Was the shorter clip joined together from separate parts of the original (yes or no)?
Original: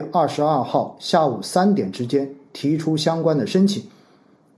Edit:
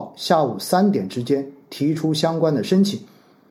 no